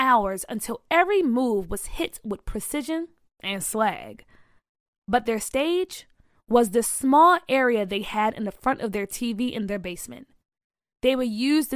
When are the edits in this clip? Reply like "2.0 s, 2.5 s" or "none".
4.9 s, 6.3 s

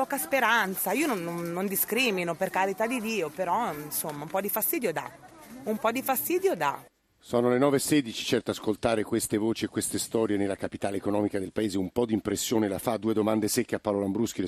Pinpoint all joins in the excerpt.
none

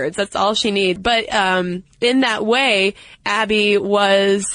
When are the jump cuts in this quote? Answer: 1.0 s

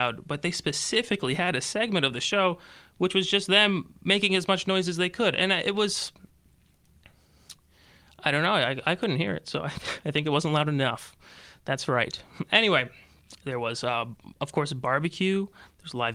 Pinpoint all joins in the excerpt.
none

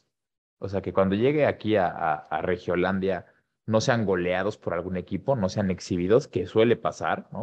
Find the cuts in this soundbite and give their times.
none

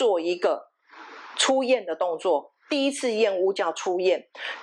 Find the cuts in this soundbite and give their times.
none

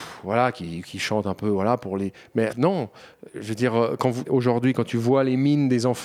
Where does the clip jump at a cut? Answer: 2.5 s, 4.2 s

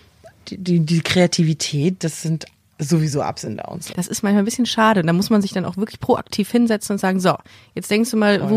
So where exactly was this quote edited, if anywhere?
3.9 s

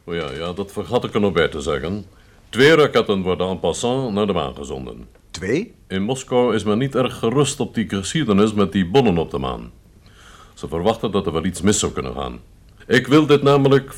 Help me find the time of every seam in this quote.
12.8 s

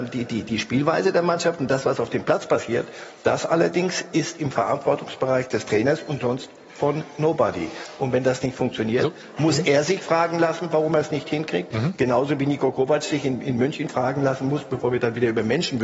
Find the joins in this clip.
none

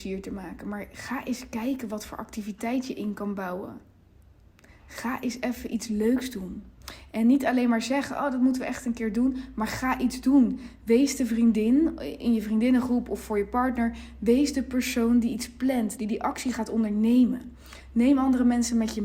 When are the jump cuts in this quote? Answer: 16.0 s

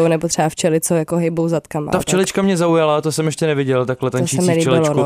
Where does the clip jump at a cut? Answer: none

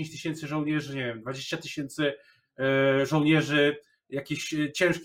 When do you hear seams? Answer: none

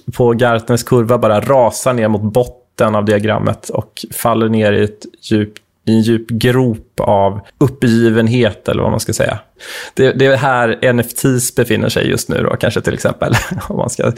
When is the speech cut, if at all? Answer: 7.5 s

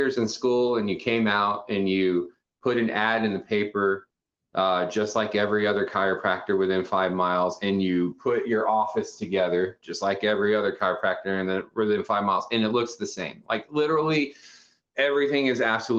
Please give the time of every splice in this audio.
none

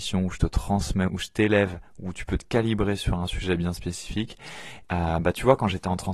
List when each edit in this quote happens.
1.1 s, 4.8 s

